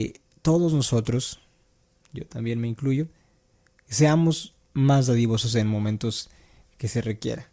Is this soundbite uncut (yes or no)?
yes